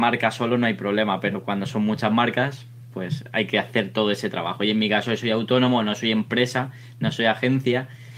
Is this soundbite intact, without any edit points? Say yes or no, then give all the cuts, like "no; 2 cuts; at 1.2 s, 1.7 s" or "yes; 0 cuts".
yes; 0 cuts